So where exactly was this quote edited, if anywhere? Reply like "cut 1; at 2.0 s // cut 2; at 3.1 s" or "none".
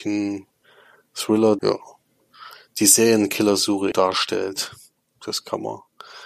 cut 1; at 1.6 s // cut 2; at 3.9 s